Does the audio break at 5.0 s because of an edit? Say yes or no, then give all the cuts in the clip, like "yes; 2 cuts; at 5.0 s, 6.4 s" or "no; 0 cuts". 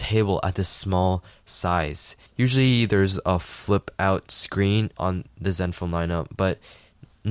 yes; 2 cuts; at 2.3 s, 5.0 s